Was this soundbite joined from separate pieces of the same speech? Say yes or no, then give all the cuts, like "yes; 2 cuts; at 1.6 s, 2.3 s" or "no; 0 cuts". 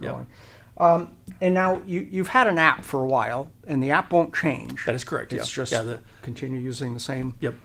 no; 0 cuts